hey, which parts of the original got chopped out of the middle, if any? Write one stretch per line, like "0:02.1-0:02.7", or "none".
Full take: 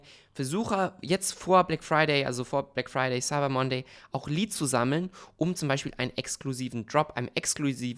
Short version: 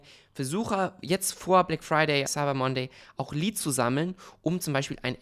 0:02.3-0:03.2